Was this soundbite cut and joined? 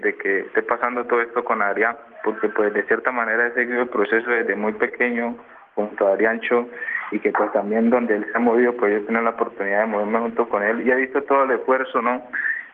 no; 0 cuts

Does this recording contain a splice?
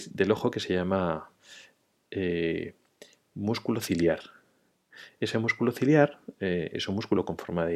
no; 0 cuts

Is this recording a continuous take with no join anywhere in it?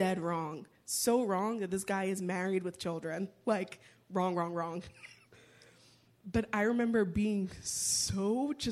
yes; 0 cuts

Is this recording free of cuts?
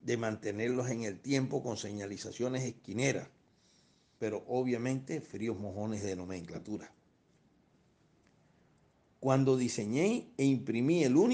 no; 1 cut; at 4.2 s

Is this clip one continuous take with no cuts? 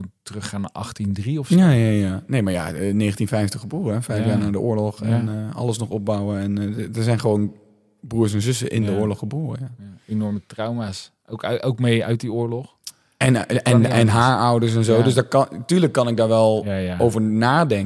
yes; 0 cuts

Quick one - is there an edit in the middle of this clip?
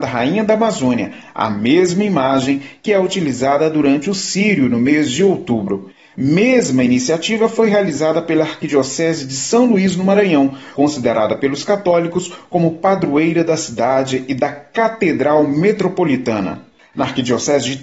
yes; 1 cut; at 10.7 s

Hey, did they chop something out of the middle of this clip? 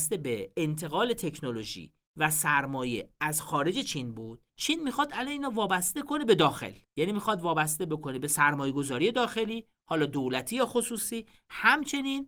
yes; 2 cuts; at 4.5 s, 6.8 s

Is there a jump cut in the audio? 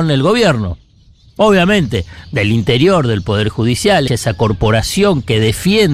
yes; 2 cuts; at 1.4 s, 4.1 s

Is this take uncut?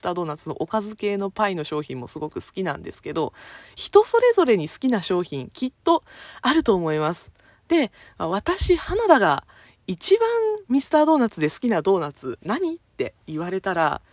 yes; 0 cuts

